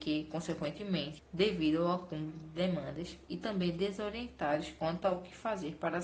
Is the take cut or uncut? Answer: cut